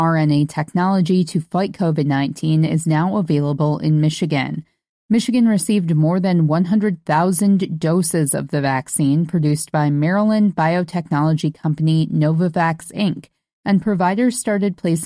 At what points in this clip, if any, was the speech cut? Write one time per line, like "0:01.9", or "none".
none